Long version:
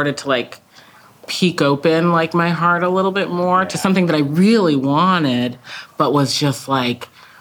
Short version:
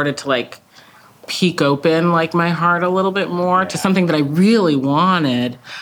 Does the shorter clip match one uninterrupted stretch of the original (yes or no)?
yes